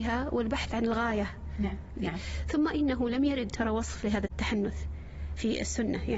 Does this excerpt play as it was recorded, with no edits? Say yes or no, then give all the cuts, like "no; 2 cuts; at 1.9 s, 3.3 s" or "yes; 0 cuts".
no; 1 cut; at 2.0 s